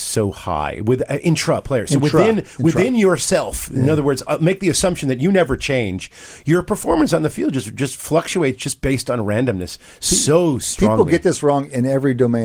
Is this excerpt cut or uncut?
uncut